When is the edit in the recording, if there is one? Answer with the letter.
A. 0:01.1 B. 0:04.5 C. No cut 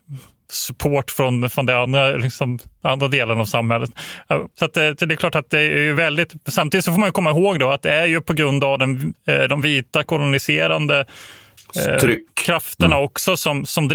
B